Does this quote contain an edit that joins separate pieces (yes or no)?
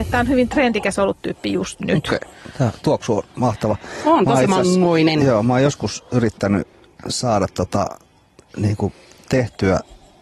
no